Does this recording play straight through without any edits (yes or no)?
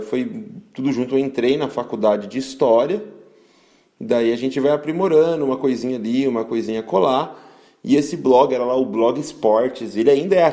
yes